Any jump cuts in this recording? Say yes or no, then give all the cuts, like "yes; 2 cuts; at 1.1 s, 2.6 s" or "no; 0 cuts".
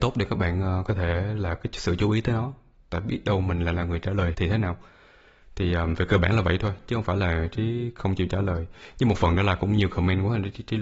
yes; 1 cut; at 4.3 s